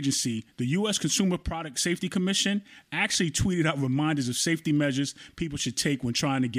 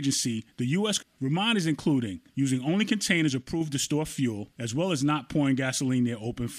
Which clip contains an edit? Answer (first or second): second